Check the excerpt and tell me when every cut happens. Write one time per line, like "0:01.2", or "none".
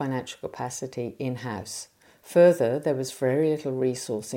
none